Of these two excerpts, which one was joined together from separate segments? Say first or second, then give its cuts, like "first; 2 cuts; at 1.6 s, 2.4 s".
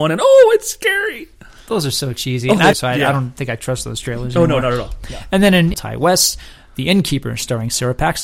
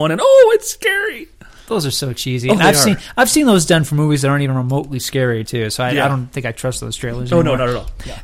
first; 2 cuts; at 2.7 s, 5.7 s